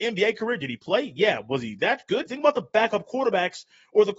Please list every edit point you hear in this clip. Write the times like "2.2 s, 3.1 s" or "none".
2.3 s